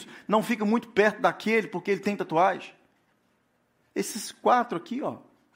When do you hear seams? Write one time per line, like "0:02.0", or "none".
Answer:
0:03.9